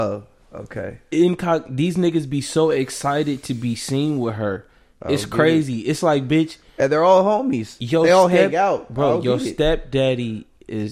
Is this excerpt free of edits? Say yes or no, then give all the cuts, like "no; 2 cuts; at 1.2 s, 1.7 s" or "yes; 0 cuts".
yes; 0 cuts